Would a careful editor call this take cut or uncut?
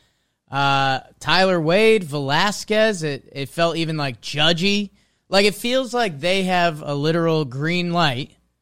uncut